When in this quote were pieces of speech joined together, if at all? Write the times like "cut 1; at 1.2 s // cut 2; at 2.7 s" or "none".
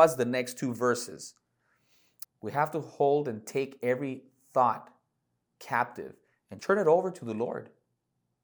cut 1; at 2.2 s // cut 2; at 6.6 s